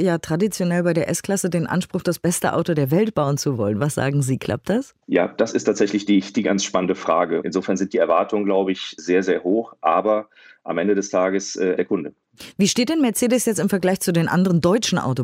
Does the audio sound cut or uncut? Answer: cut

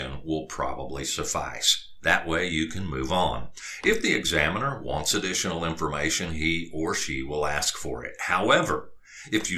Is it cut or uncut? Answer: uncut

